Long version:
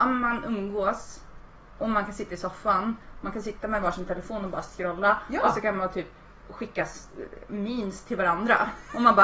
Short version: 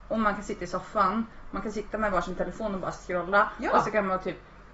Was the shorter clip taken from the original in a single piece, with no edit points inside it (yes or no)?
yes